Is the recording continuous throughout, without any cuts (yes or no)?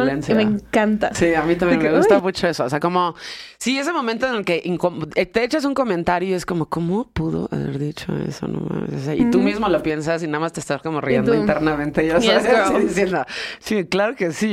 yes